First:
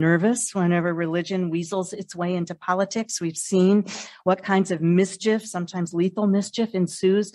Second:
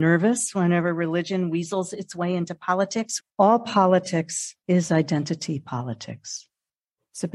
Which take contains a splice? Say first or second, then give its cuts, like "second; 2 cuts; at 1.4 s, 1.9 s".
second; 2 cuts; at 3.2 s, 4.6 s